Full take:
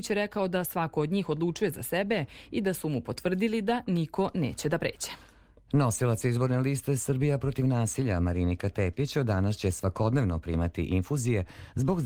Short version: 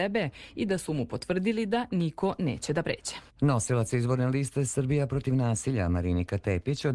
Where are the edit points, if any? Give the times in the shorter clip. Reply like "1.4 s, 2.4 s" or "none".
3.3 s